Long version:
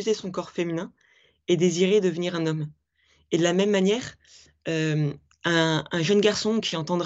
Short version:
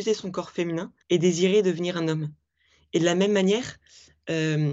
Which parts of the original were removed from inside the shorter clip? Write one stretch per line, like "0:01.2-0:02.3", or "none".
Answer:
0:01.0-0:01.4

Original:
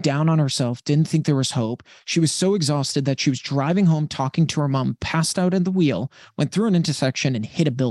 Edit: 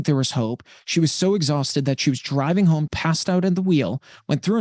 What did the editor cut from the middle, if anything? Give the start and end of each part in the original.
0:04.1-0:05.0

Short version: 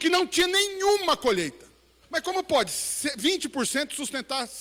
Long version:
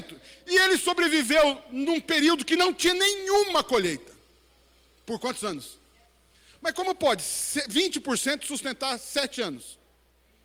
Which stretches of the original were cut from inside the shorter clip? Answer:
0:04.5-0:06.5

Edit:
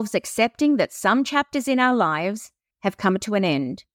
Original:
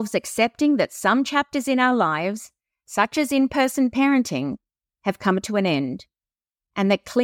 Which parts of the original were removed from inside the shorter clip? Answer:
0:02.7-0:04.9

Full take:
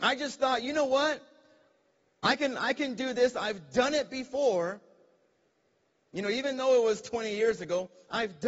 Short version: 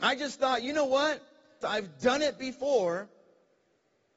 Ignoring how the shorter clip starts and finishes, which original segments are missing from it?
0:01.6-0:03.3

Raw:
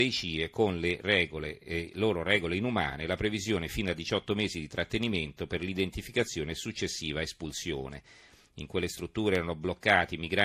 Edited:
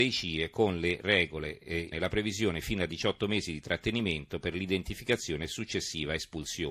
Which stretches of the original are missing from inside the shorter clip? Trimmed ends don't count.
0:01.9-0:03.0

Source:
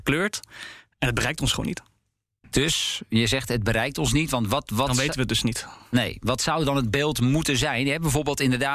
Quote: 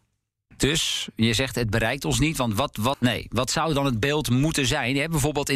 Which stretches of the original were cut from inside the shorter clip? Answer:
0:04.9-0:05.8

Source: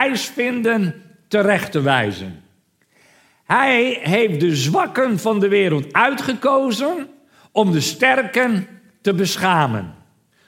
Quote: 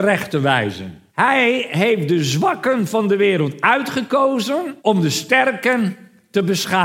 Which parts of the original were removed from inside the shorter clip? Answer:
0:02.5-0:03.4
0:07.1-0:07.5

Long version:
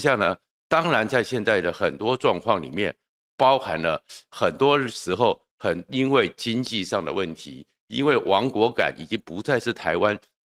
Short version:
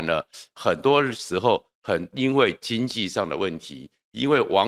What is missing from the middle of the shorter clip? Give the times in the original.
none

